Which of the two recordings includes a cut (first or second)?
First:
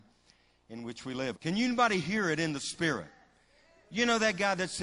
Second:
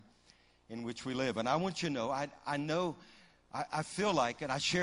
first